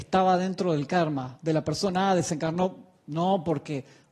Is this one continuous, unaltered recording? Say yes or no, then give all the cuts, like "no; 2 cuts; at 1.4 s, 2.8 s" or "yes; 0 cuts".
yes; 0 cuts